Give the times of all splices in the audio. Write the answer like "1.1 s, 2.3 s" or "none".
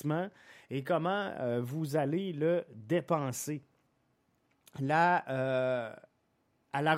none